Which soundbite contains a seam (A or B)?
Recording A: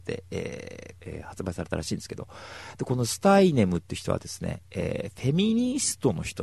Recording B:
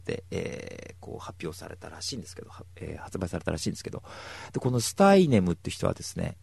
A